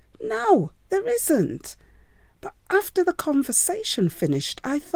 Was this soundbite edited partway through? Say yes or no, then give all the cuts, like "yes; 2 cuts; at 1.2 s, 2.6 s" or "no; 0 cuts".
no; 0 cuts